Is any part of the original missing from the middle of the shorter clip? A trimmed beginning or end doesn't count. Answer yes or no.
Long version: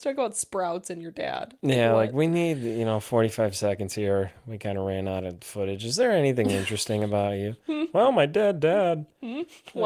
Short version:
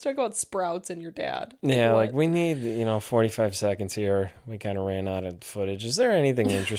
no